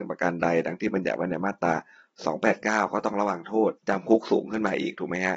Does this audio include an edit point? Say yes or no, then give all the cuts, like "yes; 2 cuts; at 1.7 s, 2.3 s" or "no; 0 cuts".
yes; 1 cut; at 3.8 s